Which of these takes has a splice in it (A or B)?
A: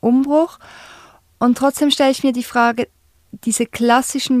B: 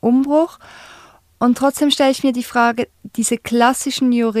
B